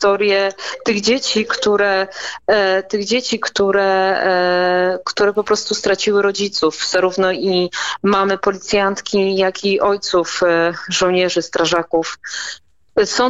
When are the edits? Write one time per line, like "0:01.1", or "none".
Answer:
none